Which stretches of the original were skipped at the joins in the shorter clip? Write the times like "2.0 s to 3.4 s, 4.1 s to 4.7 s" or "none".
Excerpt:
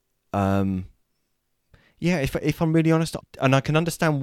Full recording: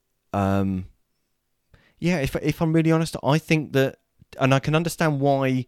3.2 s to 4.2 s